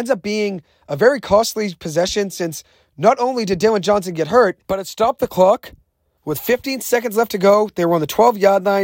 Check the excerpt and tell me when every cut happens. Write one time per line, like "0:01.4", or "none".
0:04.6
0:06.2